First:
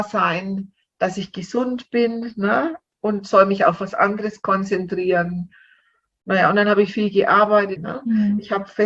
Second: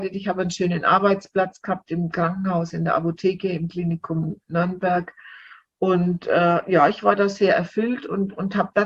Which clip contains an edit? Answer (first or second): first